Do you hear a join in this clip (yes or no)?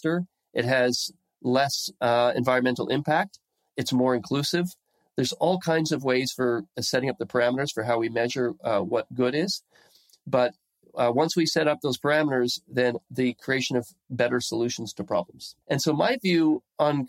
yes